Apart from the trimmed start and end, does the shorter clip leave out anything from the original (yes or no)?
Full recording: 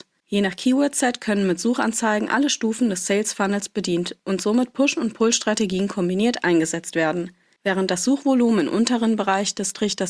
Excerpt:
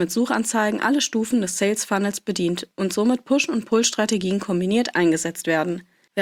no